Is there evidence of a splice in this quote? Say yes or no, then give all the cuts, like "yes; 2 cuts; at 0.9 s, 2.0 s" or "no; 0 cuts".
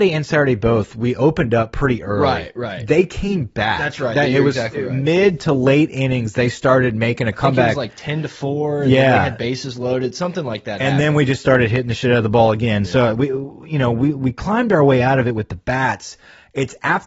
no; 0 cuts